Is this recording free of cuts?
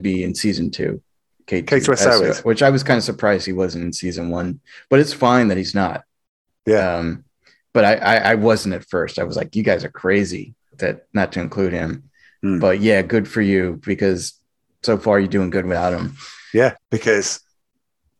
no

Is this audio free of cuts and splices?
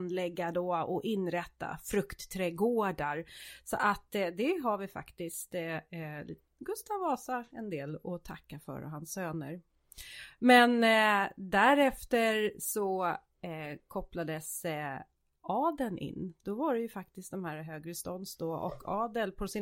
yes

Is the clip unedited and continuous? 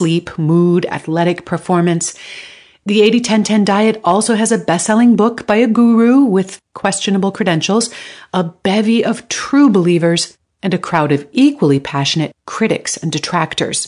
yes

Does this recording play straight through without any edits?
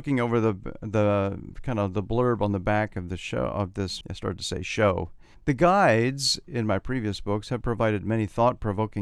no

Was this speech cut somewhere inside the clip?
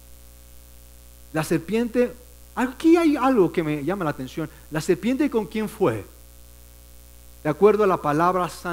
no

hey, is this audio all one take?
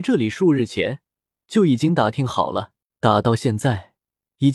no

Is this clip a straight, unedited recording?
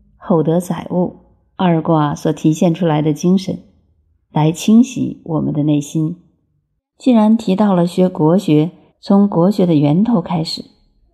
no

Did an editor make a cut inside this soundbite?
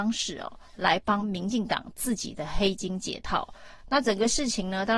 no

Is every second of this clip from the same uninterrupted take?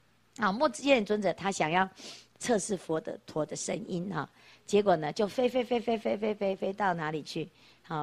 yes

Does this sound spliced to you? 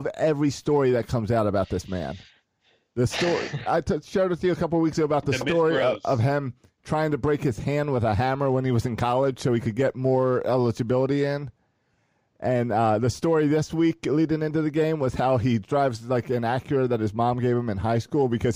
yes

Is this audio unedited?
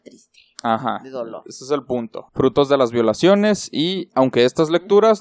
no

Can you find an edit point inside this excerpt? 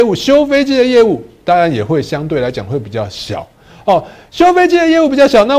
no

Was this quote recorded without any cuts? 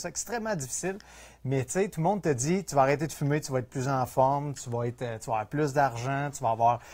yes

